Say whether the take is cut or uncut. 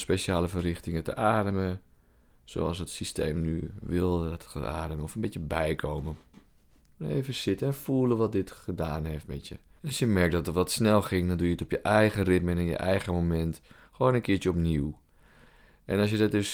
cut